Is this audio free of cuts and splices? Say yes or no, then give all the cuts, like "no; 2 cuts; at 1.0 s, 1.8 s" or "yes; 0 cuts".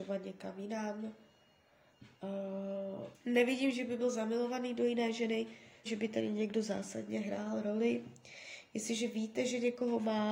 no; 2 cuts; at 3.1 s, 5.9 s